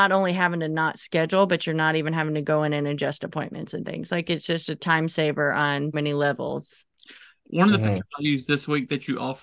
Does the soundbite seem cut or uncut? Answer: cut